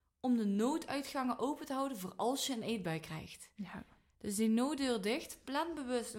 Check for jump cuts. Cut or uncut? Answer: uncut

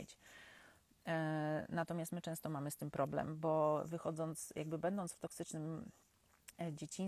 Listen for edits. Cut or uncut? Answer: uncut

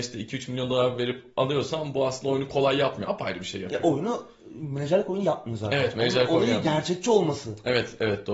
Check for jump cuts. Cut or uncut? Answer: uncut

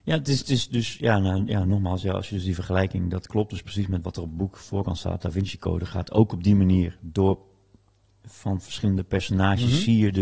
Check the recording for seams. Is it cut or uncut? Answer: uncut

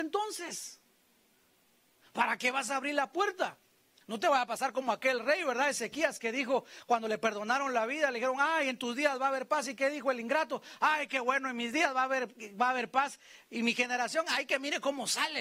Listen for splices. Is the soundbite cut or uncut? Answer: uncut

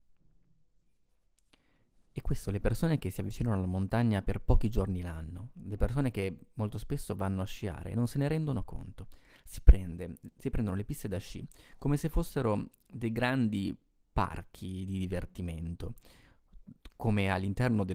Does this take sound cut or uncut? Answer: uncut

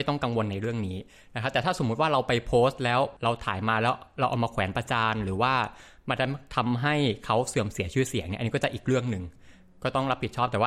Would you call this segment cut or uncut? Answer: uncut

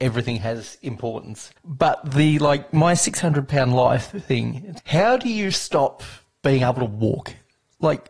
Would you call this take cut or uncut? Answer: cut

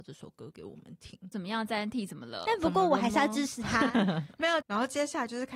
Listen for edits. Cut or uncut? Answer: cut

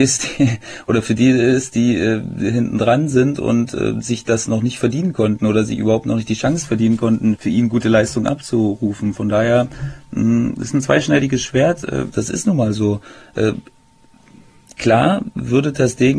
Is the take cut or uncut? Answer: cut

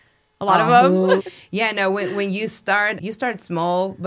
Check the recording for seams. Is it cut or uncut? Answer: cut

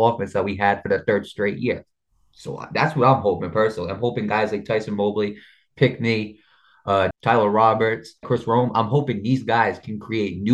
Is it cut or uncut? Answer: cut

